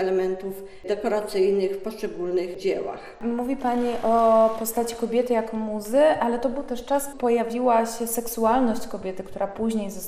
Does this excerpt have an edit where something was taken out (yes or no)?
yes